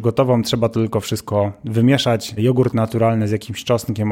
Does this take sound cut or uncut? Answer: cut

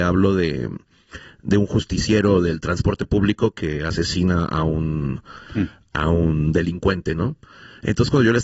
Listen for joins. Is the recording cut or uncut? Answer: uncut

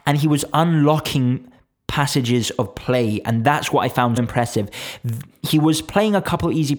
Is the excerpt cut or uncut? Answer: cut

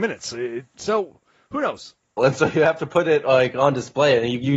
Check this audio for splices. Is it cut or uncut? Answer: cut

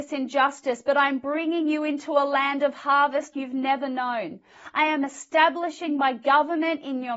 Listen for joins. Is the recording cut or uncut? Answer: cut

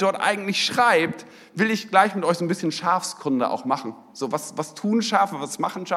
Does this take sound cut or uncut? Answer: uncut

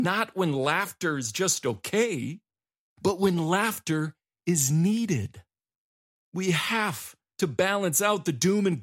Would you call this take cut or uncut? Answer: uncut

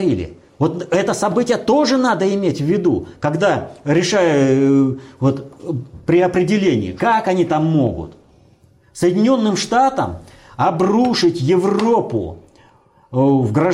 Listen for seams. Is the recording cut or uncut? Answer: cut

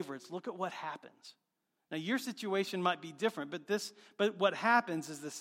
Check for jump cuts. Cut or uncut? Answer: uncut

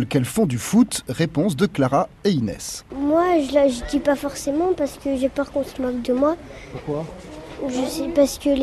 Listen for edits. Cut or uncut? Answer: uncut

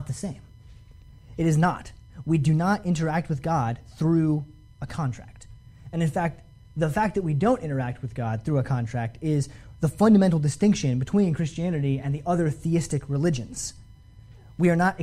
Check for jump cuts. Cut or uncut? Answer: uncut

